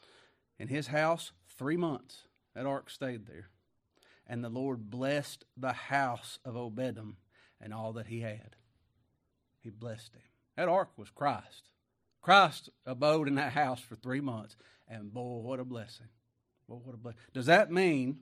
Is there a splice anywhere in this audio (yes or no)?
no